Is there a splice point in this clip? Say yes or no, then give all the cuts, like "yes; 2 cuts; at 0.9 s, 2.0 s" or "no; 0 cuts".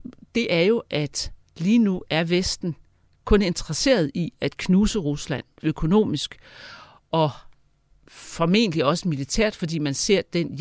no; 0 cuts